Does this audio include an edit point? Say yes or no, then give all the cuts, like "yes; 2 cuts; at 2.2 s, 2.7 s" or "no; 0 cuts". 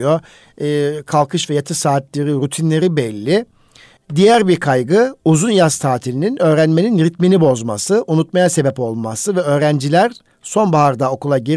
yes; 1 cut; at 4.0 s